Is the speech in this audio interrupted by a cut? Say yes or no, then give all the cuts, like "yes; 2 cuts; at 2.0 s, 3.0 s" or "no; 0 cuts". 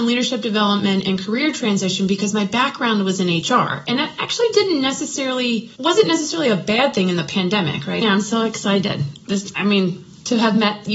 yes; 2 cuts; at 5.8 s, 8.0 s